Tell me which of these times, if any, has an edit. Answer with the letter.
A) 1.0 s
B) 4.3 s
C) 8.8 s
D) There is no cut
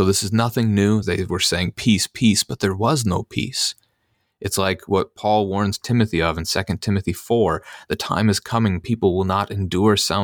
A